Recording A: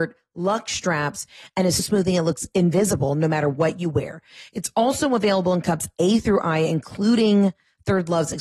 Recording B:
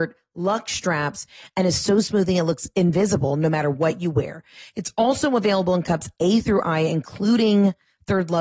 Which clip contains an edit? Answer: A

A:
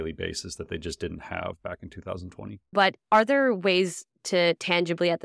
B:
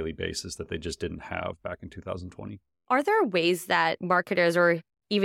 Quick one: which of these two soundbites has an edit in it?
A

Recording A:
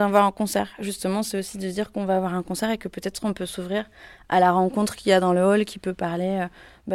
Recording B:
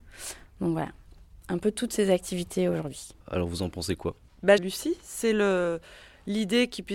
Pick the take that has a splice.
B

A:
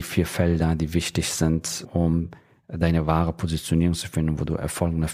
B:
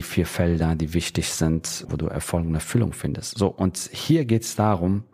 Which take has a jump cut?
B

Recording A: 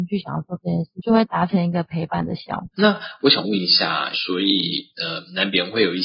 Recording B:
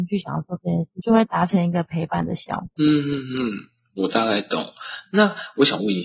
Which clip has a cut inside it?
A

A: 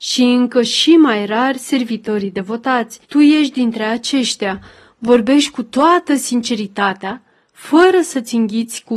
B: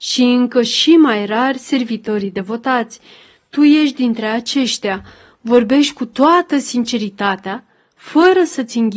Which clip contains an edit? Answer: A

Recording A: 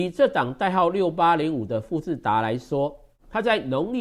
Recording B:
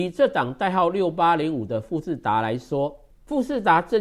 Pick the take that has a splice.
B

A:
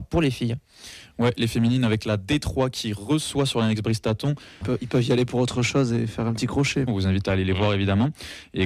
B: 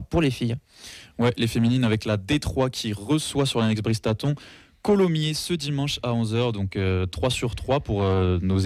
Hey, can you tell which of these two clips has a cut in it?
A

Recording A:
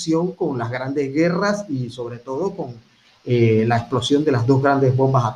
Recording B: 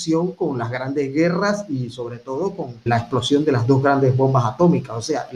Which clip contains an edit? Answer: B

